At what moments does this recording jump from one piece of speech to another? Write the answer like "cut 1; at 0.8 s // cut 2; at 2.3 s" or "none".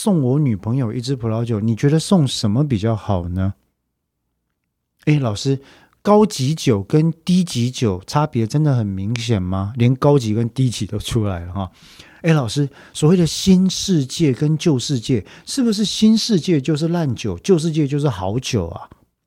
none